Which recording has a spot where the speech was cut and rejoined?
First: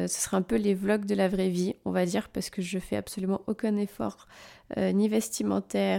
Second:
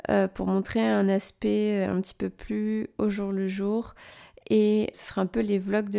second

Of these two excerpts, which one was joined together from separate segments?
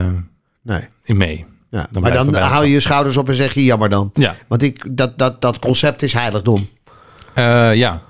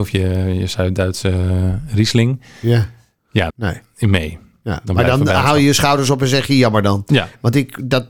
second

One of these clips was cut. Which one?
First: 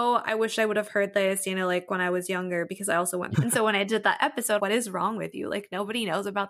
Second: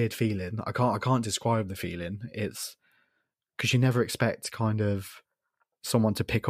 first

